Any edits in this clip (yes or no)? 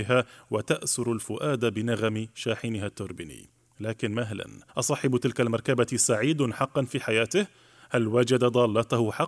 yes